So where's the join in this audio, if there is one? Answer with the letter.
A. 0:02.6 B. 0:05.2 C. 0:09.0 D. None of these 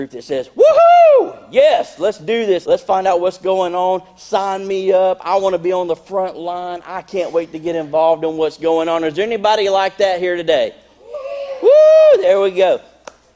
A